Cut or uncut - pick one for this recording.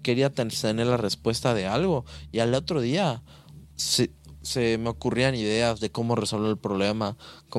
uncut